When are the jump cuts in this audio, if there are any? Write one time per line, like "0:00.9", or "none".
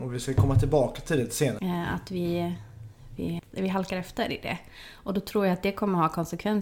0:01.6
0:03.4